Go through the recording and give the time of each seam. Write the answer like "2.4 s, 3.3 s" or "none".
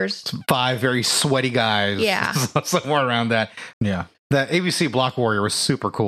3.7 s